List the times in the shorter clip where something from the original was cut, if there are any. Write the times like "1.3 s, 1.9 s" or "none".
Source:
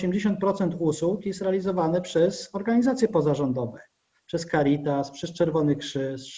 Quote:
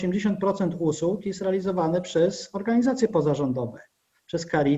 none

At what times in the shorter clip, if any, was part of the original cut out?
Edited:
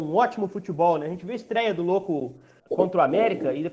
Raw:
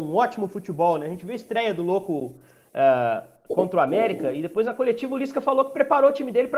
2.6 s

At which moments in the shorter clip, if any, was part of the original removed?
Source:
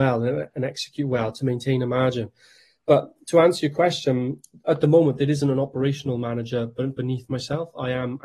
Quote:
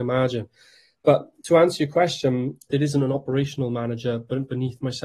2.7 s

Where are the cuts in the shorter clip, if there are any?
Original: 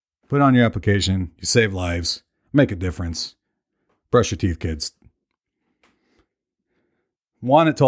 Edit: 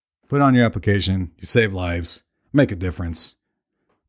none

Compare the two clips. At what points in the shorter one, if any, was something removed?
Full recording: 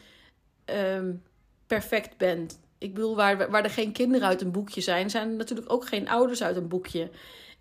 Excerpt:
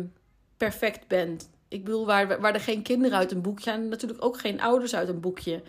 3.6 s

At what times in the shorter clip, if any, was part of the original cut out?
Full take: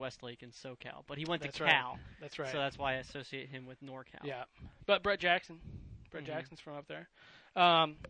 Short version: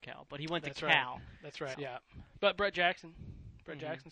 1.7 s

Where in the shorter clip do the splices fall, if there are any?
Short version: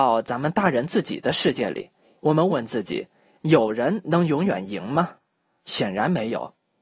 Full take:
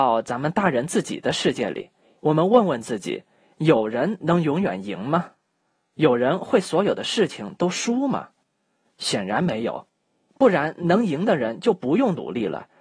2.5 s, 5.6 s

